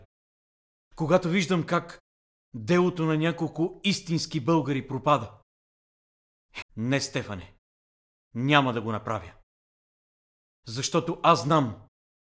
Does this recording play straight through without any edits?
no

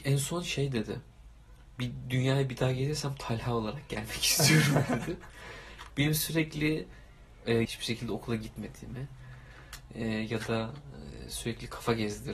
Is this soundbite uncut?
no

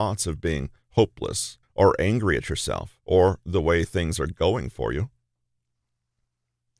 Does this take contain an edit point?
yes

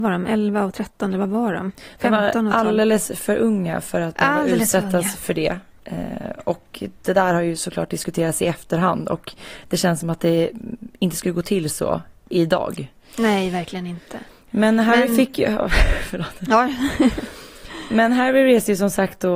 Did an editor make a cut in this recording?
no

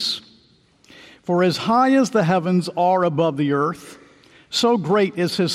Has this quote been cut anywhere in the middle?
no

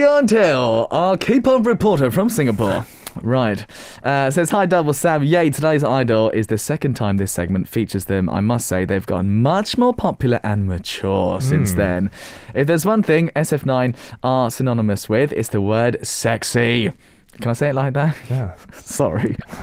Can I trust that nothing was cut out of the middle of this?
no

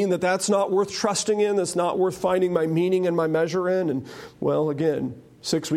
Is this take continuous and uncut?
yes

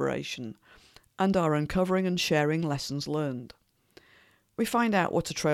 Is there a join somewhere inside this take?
no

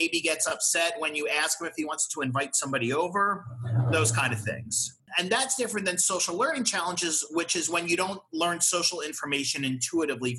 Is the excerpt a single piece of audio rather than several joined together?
no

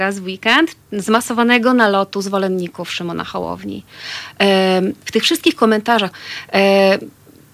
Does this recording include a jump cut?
yes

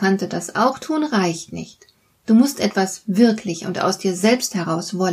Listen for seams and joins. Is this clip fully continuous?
yes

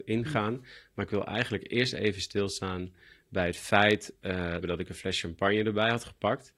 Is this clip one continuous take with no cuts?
no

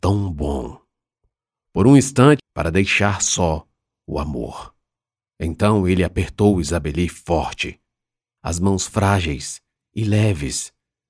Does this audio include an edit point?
yes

